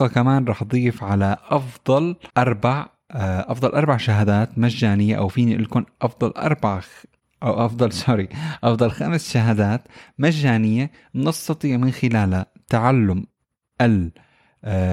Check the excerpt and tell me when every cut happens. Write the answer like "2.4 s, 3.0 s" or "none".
2.3 s